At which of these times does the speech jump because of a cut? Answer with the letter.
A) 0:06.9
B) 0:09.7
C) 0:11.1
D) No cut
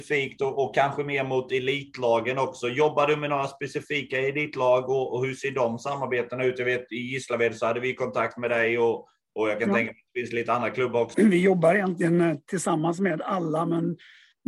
C